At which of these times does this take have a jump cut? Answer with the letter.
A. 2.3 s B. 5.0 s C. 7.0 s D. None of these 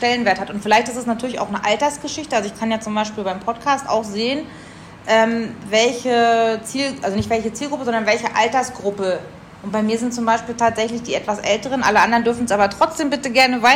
D